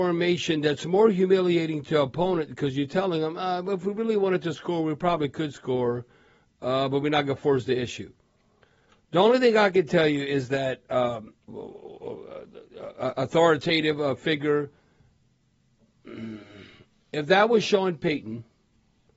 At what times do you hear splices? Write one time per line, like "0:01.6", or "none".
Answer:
0:11.5